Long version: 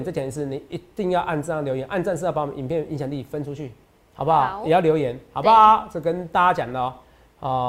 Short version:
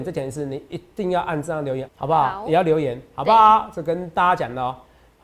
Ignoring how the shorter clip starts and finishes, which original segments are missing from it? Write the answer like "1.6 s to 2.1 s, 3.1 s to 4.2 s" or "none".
1.9 s to 4.0 s